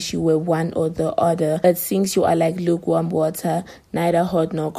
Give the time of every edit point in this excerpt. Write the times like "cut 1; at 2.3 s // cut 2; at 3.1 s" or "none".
none